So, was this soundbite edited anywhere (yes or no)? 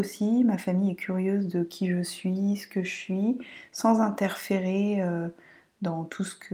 no